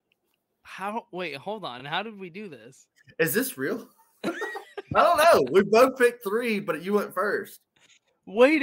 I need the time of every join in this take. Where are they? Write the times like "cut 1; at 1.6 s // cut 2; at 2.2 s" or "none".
none

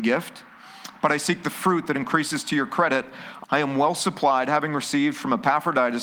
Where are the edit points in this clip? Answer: cut 1; at 3.4 s

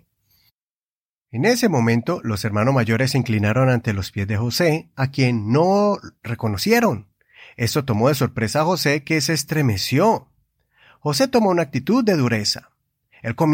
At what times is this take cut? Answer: cut 1; at 1.2 s

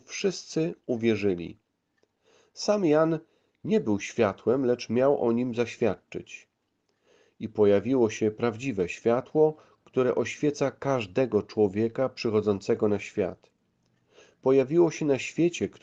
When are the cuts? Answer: none

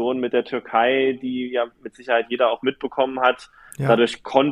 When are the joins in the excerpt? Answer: none

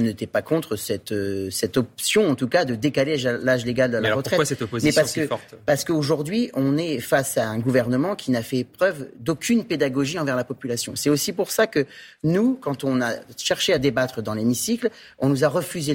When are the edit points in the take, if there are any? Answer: none

